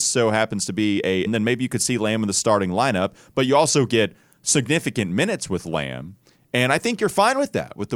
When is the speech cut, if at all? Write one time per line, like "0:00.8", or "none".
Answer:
0:01.3